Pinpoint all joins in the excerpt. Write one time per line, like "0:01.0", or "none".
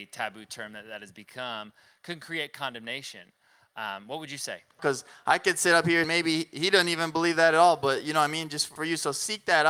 0:04.8
0:06.0
0:08.8